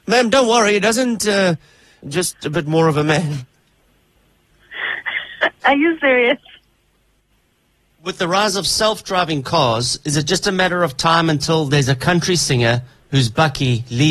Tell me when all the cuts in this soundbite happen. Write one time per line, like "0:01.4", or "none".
0:02.0